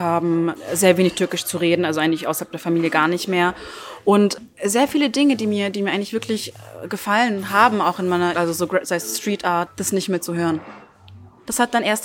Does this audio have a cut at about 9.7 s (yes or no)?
yes